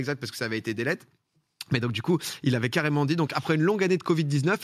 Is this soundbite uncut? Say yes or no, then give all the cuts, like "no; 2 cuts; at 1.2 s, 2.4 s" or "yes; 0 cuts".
yes; 0 cuts